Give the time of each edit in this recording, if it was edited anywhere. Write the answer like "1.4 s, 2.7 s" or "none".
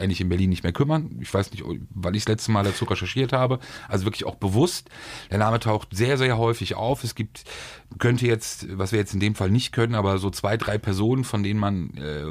none